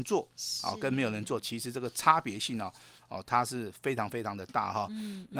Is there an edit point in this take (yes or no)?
no